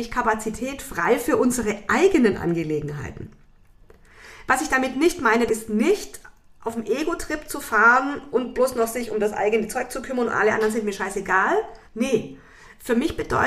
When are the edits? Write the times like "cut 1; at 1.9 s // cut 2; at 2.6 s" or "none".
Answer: cut 1; at 5.5 s // cut 2; at 11.8 s